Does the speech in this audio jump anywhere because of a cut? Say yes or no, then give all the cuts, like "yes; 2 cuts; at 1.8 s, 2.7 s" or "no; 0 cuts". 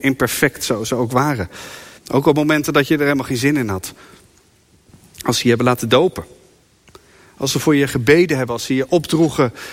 yes; 1 cut; at 2.0 s